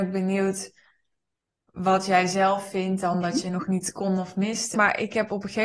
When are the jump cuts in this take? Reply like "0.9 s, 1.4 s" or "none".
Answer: 4.7 s